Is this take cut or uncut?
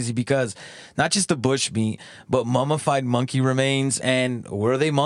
uncut